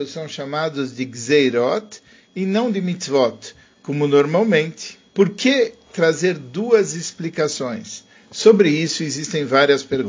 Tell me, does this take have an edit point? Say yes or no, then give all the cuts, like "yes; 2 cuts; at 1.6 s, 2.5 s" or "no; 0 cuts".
yes; 2 cuts; at 5.1 s, 8.1 s